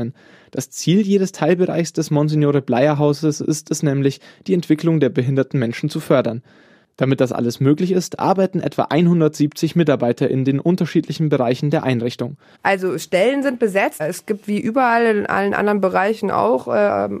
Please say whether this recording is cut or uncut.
cut